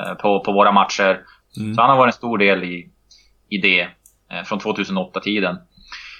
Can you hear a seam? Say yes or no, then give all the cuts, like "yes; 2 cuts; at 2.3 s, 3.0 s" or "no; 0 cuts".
yes; 1 cut; at 1.4 s